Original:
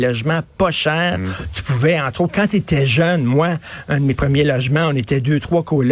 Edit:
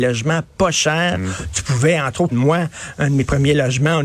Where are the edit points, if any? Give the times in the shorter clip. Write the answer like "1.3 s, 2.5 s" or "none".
2.3 s